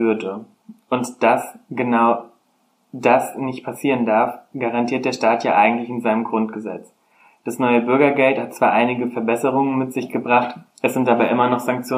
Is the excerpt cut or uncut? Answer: uncut